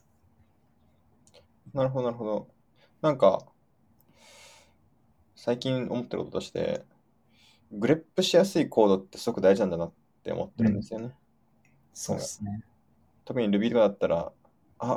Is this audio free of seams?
yes; 0 cuts

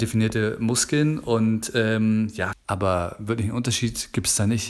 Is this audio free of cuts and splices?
no; 1 cut; at 2.5 s

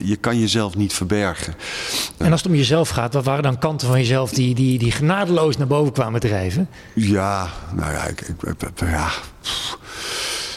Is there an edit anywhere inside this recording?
yes; 1 cut; at 2.2 s

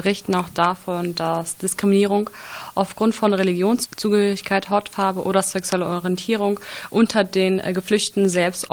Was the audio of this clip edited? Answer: no; 0 cuts

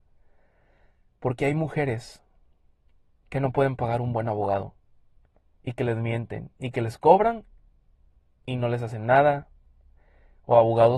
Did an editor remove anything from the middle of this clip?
yes; 1 cut; at 5.6 s

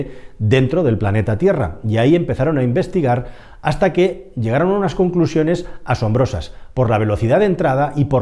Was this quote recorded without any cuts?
yes; 0 cuts

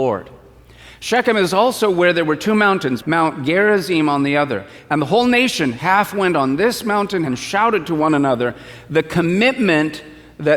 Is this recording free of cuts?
no; 2 cuts; at 3.0 s, 7.3 s

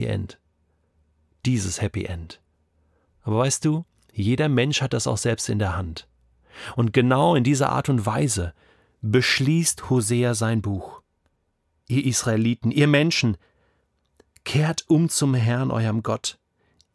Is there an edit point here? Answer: no; 0 cuts

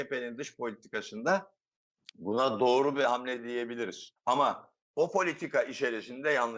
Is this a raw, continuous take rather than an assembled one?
no; 1 cut; at 4.2 s

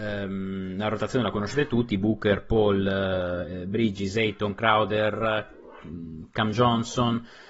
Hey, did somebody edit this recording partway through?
no; 0 cuts

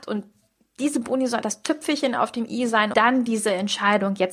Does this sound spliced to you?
yes; 2 cuts; at 1.4 s, 2.9 s

